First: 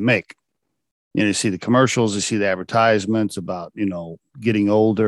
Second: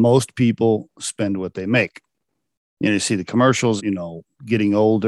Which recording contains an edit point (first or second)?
second